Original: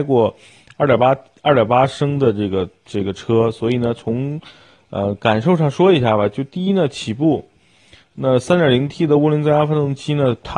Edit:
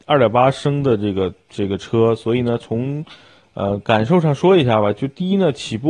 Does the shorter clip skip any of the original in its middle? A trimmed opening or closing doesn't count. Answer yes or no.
no